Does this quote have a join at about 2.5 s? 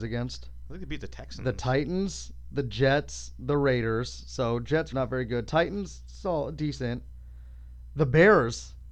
no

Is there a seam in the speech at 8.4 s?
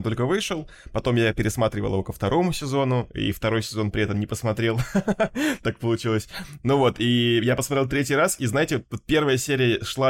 no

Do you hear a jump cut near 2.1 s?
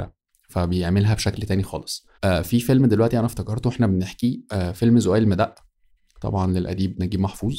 yes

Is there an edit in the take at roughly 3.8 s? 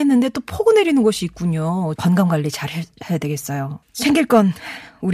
yes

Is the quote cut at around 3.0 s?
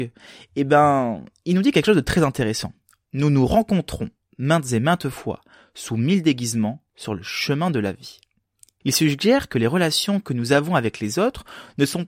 no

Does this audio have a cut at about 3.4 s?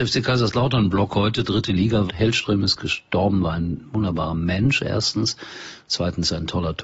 no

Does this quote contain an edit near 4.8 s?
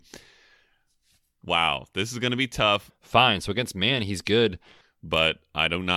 yes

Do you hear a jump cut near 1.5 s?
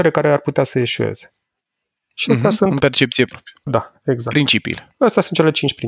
no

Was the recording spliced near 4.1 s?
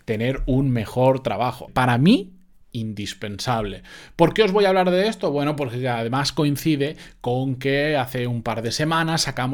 no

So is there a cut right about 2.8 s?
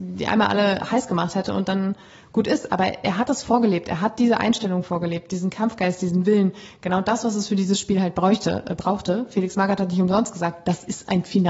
no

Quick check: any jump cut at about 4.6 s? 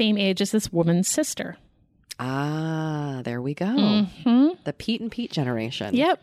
no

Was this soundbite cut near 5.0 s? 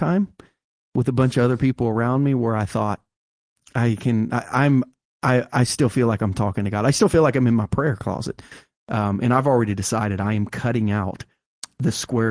no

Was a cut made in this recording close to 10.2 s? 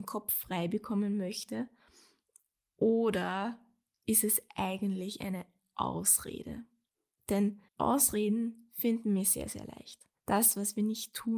yes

